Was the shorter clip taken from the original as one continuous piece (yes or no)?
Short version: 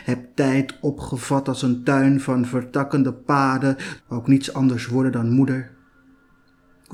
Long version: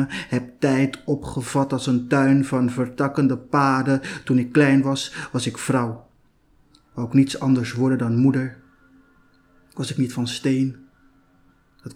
no